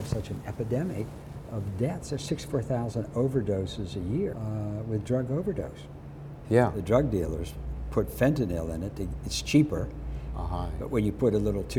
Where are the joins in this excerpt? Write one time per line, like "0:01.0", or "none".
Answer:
0:04.3
0:06.5
0:10.3